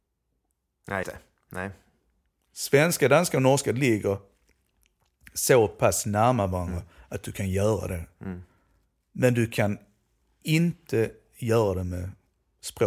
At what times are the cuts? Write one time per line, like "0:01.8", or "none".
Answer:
0:01.0